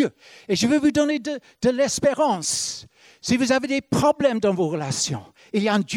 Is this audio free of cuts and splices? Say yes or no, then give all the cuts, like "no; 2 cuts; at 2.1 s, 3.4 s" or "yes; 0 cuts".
yes; 0 cuts